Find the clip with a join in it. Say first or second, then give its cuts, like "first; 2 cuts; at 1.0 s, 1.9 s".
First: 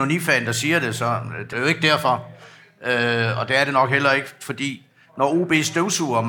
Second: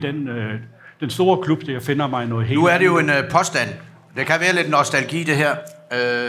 first; 1 cut; at 1.5 s